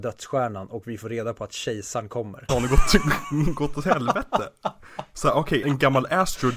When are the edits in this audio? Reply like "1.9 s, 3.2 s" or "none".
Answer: 2.5 s, 5.6 s